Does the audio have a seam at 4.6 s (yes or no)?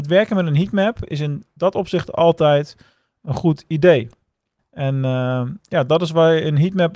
yes